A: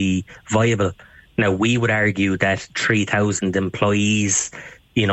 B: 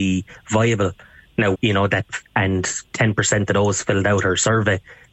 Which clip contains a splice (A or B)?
B